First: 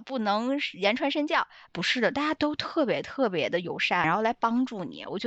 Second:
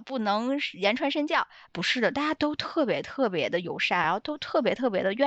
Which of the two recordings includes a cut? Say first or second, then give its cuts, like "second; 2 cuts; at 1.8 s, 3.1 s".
first; 1 cut; at 4.0 s